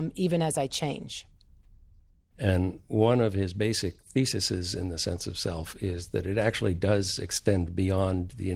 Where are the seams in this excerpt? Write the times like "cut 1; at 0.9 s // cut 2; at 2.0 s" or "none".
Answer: cut 1; at 2.3 s